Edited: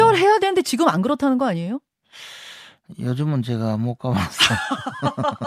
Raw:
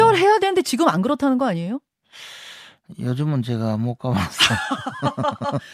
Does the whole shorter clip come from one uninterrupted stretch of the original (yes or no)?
yes